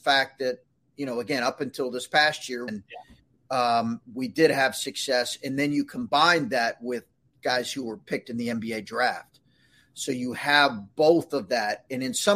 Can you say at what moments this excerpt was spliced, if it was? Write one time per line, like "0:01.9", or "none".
0:02.7

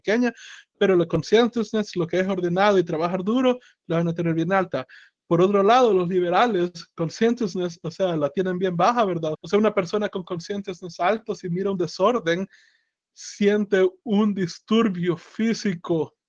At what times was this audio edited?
0:09.3

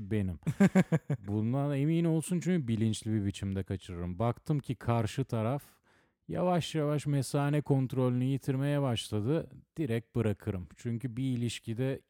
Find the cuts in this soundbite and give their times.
none

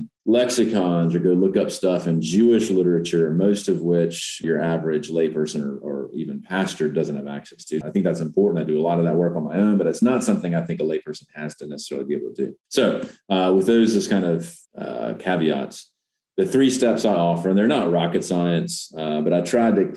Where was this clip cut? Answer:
0:04.4
0:07.8

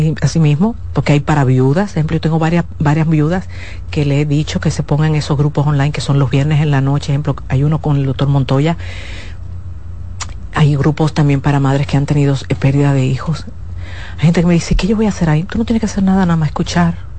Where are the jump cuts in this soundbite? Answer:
none

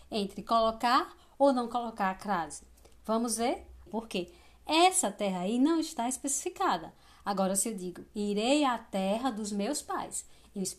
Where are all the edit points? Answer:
0:03.9

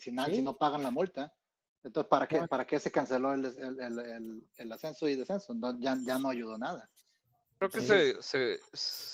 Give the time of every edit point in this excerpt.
none

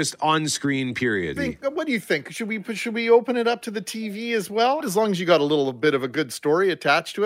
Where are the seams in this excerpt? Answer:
0:01.4
0:04.8

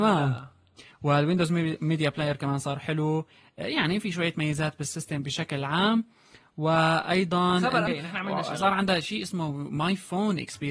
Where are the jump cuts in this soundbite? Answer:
0:07.9

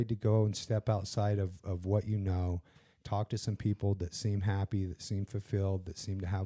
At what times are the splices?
none

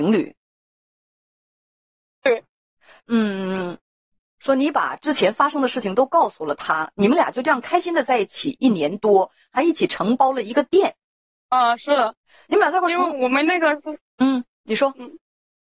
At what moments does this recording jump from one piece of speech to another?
0:03.0
0:11.3

